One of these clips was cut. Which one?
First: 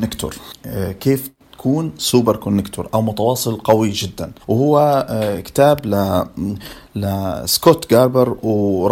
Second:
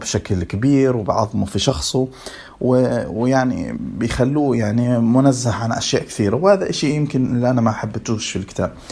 first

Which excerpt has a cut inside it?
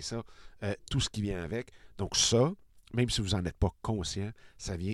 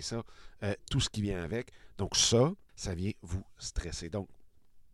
second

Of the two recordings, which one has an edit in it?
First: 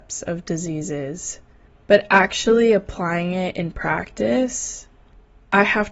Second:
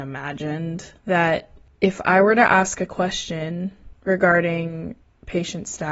second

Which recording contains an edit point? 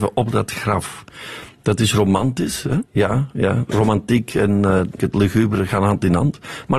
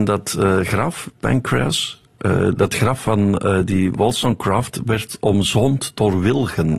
first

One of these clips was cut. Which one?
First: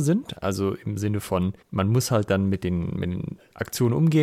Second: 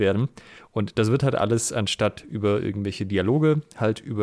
first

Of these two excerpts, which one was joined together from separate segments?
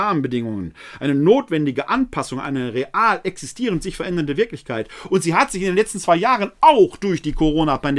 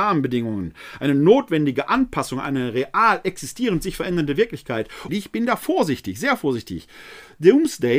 second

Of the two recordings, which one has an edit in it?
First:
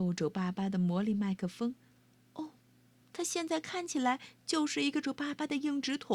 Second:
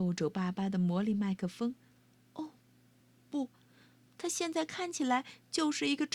first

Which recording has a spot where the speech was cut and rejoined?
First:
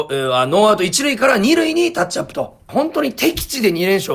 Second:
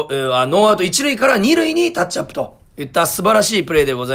first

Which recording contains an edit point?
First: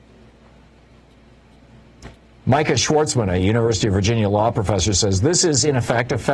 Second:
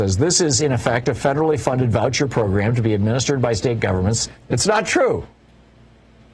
second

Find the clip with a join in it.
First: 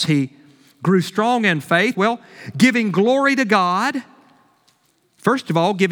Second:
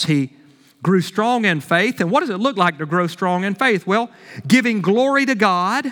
first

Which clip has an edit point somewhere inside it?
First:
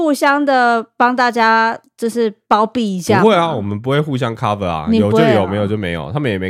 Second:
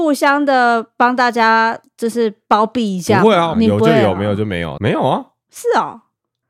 second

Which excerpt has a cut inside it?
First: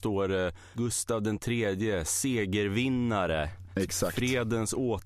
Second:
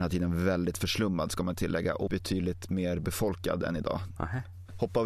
second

